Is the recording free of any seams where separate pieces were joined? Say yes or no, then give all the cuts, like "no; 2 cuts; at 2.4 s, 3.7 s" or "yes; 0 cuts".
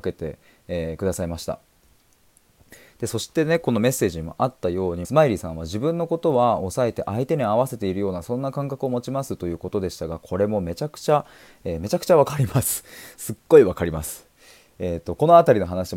no; 1 cut; at 5.0 s